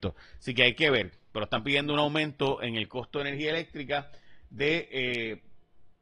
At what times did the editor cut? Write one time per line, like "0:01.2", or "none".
none

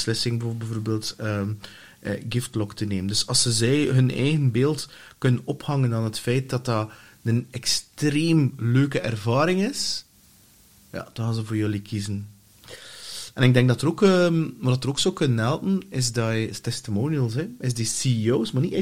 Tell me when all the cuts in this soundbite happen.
none

